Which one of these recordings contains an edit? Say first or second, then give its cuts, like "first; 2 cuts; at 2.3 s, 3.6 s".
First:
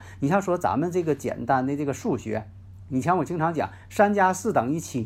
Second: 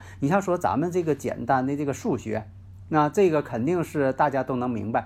second; 1 cut; at 2.9 s